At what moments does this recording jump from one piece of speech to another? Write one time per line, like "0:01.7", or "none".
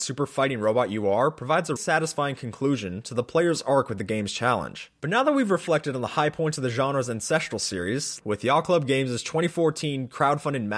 0:01.8
0:05.0
0:08.2

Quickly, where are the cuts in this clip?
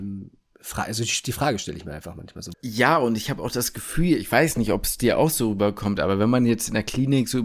0:02.5

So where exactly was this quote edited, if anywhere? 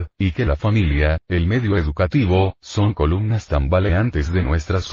0:01.2

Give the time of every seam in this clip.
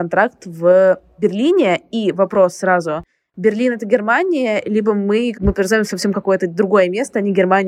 0:05.3

